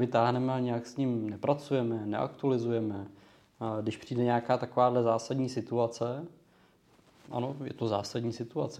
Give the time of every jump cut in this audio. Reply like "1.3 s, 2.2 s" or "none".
none